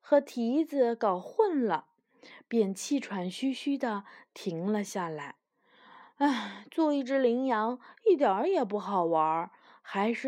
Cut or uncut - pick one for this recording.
uncut